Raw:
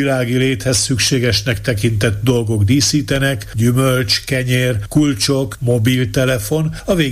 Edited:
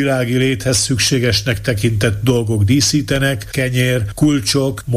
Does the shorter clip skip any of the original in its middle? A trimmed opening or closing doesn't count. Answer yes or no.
yes